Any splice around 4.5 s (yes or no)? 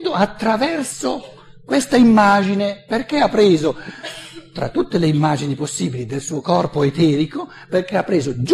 no